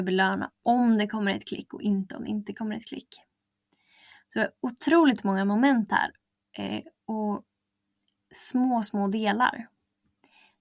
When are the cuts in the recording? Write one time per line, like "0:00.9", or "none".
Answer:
none